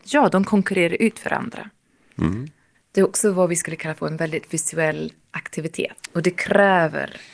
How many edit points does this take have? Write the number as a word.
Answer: two